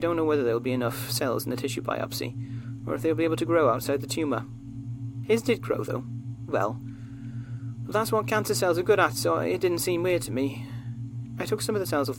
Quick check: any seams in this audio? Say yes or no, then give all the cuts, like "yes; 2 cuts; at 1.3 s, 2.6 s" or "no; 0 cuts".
yes; 1 cut; at 6.5 s